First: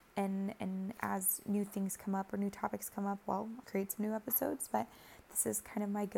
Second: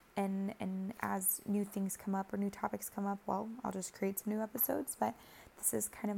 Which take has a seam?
first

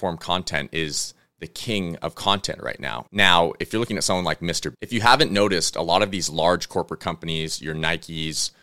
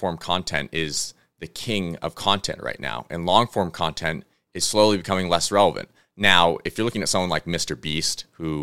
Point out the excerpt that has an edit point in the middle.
first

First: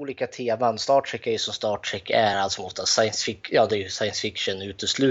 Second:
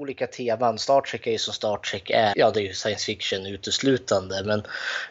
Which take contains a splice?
second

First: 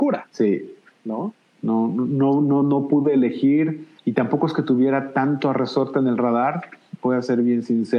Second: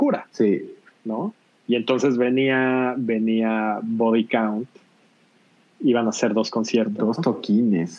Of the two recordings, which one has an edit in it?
first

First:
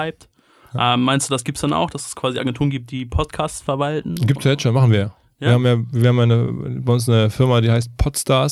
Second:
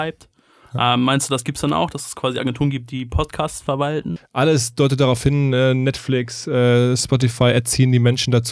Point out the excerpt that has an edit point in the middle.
second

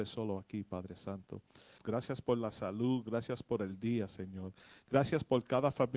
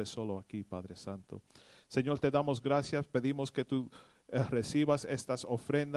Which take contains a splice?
first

